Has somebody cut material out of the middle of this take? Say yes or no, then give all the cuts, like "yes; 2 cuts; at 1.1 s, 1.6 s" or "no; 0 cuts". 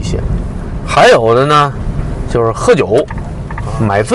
no; 0 cuts